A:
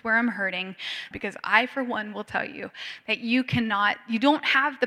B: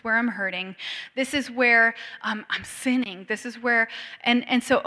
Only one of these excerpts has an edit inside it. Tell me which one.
A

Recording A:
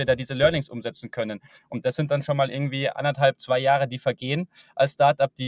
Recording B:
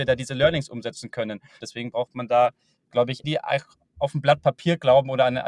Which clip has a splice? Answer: B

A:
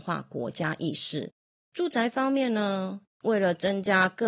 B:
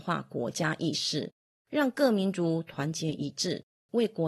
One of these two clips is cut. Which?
A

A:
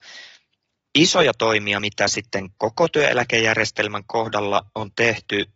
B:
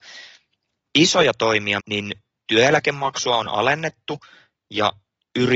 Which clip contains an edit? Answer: B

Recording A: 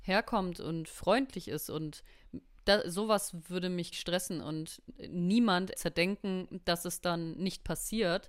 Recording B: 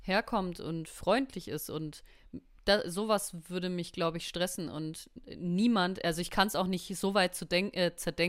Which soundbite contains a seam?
A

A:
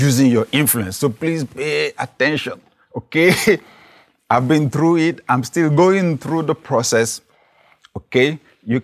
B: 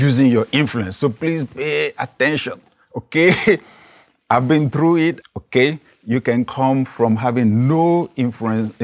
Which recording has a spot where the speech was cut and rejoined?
B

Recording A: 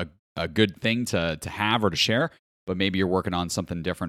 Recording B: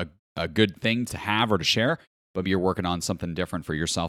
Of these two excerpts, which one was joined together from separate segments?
B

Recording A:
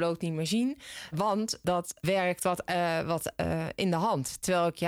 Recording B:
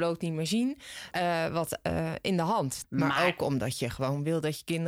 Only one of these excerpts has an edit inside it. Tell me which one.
B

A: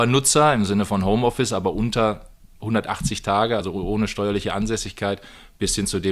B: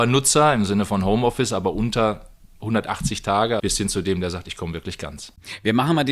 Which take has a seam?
B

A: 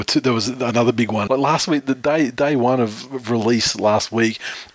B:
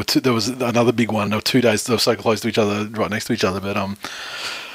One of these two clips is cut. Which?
A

